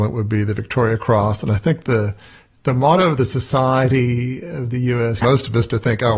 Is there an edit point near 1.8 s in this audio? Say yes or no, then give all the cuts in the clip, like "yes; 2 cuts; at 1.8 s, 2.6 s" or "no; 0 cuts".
no; 1 cut; at 5.2 s